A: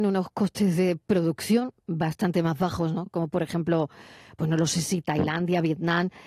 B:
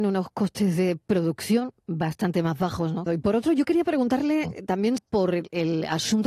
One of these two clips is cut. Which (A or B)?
B